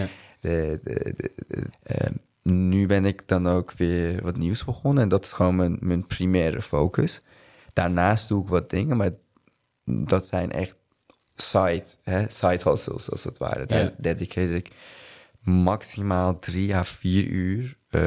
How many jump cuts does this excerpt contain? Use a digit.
1